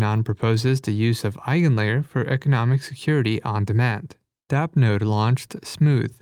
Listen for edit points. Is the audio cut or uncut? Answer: uncut